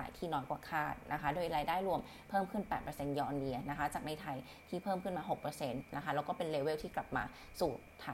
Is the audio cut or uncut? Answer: uncut